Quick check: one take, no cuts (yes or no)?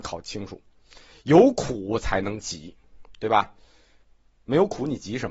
yes